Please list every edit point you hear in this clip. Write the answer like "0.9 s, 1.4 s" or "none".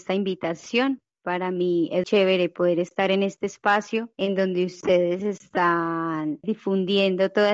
2.0 s, 6.4 s